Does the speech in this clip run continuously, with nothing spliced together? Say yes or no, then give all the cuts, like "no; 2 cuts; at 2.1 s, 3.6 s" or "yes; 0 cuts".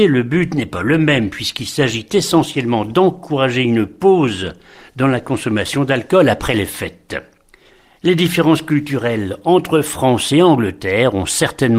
yes; 0 cuts